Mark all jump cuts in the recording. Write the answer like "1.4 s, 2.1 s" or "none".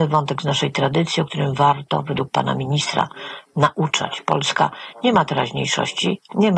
none